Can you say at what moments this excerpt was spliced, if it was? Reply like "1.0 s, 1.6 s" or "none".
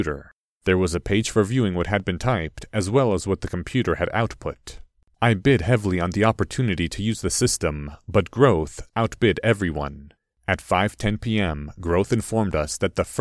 8.9 s, 10.3 s

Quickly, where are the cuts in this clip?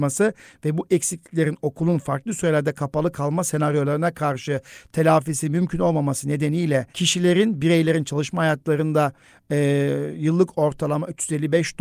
6.9 s

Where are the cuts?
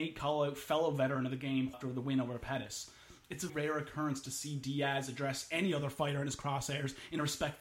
1.7 s, 3.5 s

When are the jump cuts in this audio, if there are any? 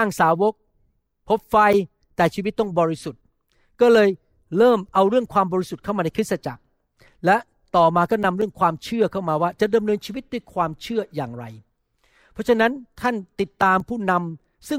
none

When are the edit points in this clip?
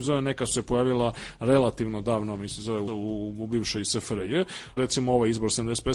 2.9 s, 4.8 s

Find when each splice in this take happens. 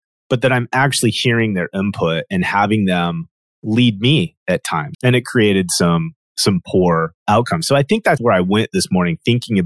4.9 s, 8.2 s

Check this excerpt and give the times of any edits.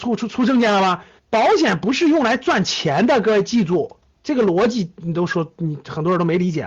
1.2 s

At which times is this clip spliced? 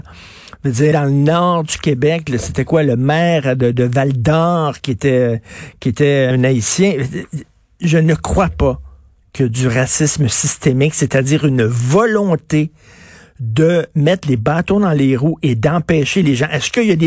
0.9 s, 6.3 s

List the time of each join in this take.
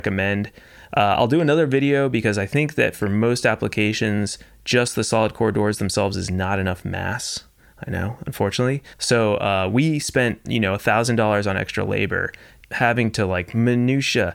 8.9 s, 10.5 s, 12.6 s

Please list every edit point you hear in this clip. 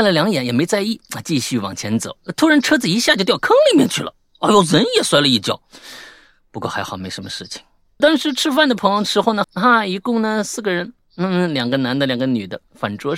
8.0 s, 9.4 s

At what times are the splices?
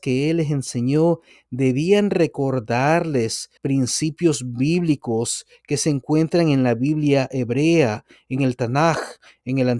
3.6 s

